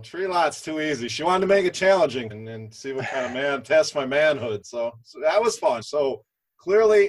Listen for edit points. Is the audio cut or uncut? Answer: cut